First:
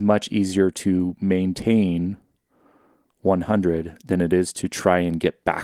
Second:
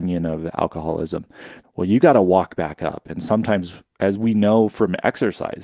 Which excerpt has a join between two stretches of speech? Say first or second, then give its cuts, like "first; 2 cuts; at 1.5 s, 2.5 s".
second; 1 cut; at 1.6 s